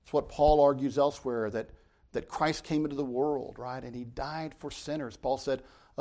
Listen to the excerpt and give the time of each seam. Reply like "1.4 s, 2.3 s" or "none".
none